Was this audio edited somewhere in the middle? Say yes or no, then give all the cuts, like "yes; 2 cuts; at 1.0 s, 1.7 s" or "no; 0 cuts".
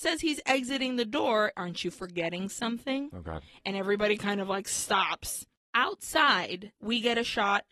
yes; 1 cut; at 1.5 s